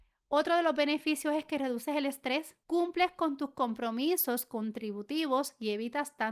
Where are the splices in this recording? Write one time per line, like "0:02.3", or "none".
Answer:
0:02.6